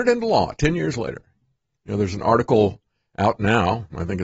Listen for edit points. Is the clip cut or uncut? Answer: uncut